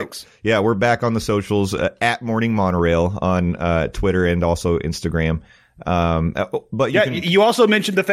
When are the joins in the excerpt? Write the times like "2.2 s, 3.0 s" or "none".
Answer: none